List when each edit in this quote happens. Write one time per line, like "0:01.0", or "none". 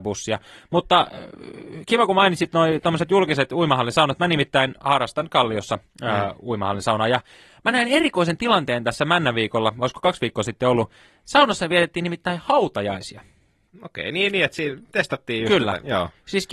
none